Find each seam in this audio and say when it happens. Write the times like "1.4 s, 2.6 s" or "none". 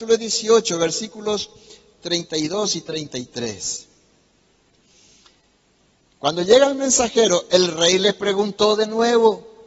none